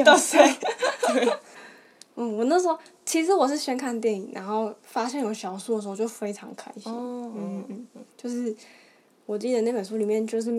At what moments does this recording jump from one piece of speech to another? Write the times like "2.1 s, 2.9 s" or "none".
1.6 s